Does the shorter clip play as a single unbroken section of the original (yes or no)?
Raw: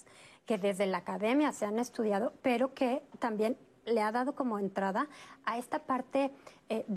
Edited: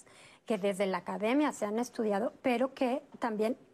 yes